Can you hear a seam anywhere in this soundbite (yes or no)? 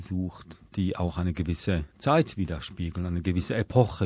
no